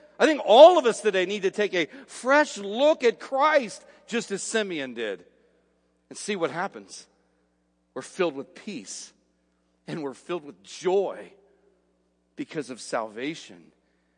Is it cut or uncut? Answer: uncut